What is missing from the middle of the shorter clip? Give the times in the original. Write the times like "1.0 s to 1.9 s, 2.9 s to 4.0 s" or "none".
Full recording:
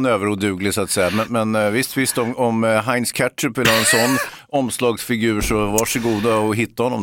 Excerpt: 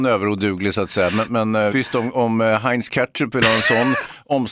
1.7 s to 1.9 s